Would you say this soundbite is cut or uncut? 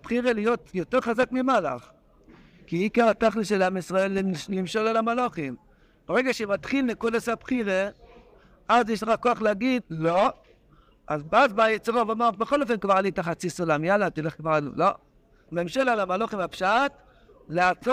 cut